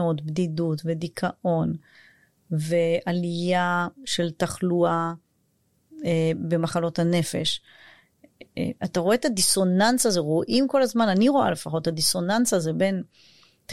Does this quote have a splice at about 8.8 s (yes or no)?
no